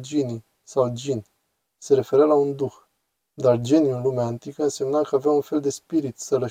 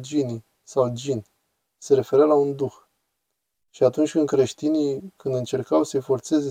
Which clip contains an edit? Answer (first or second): first